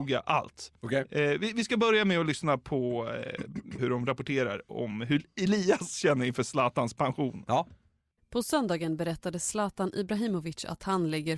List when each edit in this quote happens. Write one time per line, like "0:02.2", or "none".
0:03.8